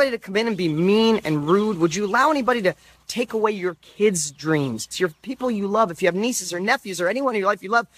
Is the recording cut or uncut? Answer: cut